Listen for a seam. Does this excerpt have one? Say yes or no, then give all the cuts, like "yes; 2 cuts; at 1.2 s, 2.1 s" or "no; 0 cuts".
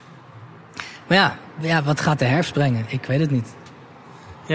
no; 0 cuts